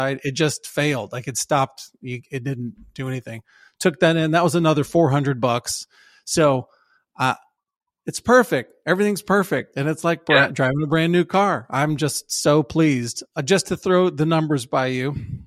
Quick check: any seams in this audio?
no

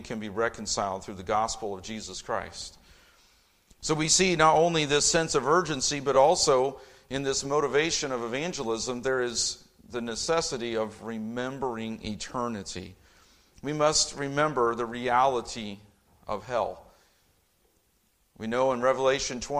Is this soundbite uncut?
yes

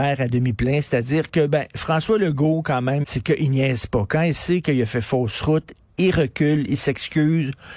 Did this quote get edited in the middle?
yes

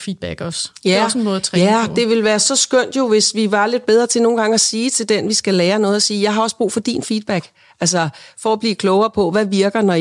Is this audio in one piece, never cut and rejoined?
yes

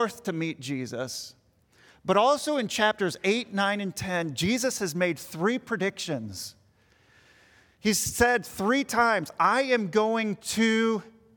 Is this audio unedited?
yes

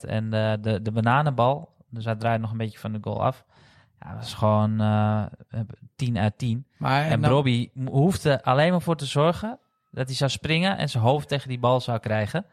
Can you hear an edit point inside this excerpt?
no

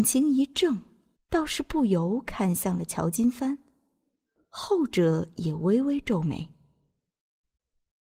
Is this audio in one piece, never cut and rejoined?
no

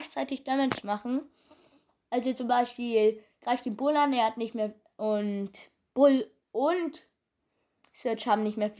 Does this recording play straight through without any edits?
yes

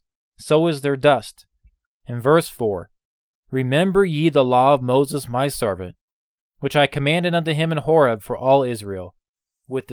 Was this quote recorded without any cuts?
no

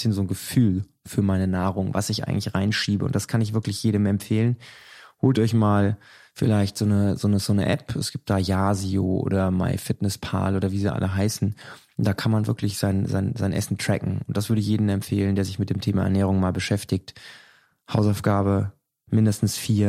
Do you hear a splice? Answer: no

